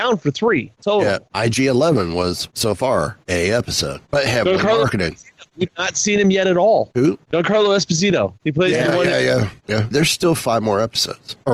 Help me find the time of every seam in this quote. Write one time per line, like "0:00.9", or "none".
0:09.9

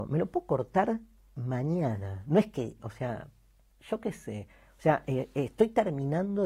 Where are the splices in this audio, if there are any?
0:02.8

